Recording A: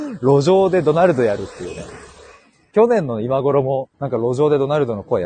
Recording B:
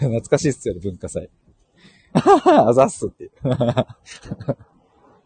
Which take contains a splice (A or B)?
A